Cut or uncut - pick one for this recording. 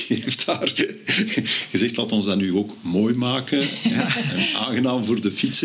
uncut